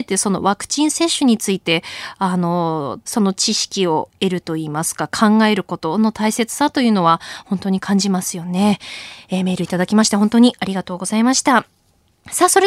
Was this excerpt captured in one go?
no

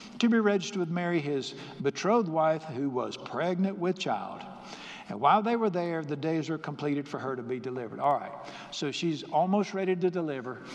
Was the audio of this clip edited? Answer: no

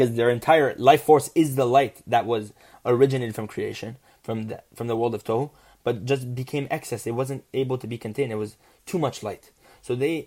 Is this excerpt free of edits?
yes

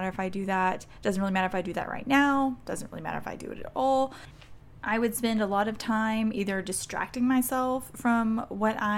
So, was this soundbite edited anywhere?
no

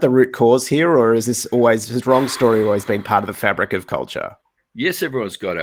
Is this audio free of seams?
yes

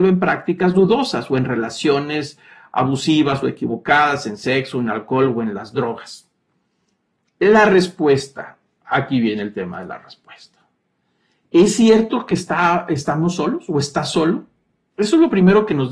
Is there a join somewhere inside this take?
no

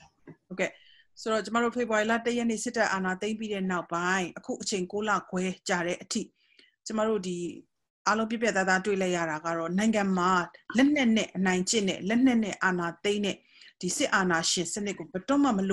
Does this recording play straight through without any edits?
yes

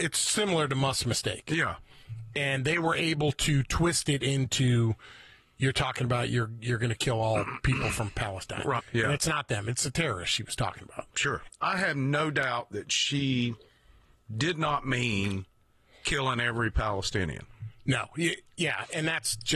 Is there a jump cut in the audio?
yes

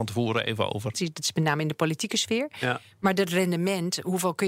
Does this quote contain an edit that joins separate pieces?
yes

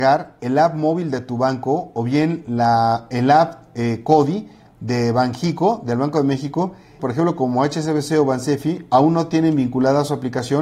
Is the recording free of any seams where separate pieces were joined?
no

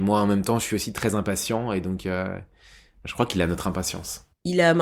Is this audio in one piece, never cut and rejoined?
yes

